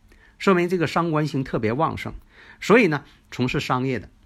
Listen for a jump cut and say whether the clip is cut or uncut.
cut